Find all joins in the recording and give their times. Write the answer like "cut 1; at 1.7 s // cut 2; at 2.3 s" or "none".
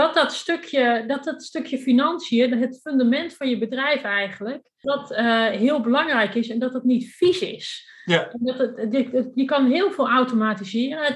cut 1; at 4.8 s